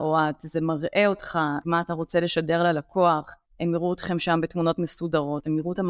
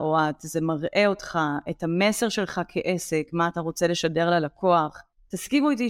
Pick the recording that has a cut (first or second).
first